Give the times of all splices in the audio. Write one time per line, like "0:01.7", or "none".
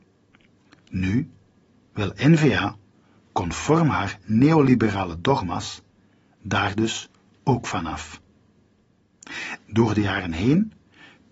0:09.6